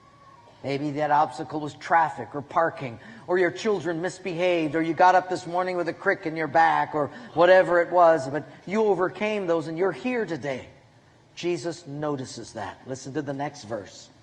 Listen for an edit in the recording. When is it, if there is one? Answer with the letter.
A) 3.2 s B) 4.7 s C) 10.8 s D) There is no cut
D